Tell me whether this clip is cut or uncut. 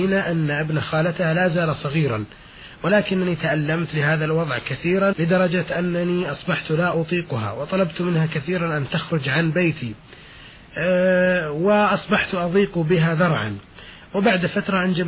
cut